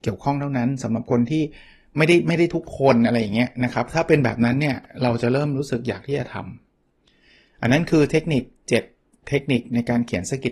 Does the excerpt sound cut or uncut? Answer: uncut